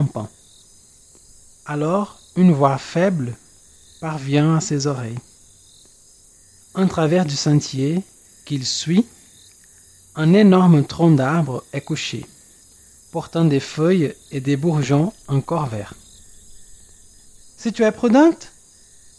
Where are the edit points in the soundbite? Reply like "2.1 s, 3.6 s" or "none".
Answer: 6.6 s, 17.4 s